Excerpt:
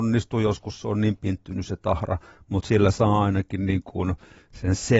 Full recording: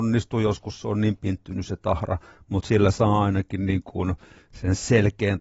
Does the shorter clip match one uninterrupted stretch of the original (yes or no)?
yes